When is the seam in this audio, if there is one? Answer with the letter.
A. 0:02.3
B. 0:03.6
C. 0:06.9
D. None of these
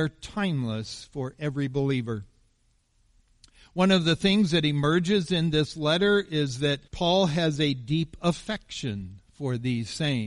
C